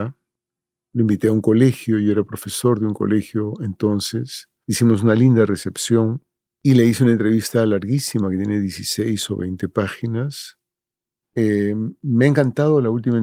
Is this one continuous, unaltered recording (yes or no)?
no